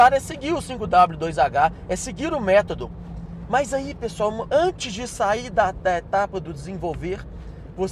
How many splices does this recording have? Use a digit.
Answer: 1